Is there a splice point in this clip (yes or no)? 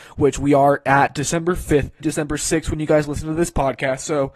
yes